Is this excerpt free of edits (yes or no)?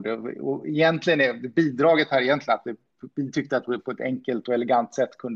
yes